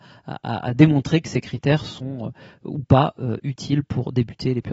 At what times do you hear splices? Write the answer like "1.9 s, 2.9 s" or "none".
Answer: none